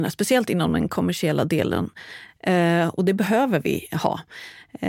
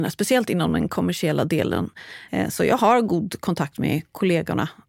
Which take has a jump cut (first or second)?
second